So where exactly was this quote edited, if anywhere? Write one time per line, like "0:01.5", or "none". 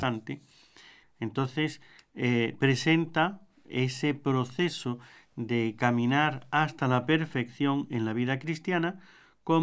0:01.0